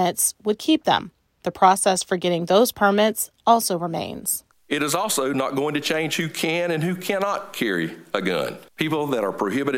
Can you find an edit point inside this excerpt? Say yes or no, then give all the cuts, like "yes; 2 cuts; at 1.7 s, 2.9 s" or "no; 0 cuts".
yes; 1 cut; at 8.7 s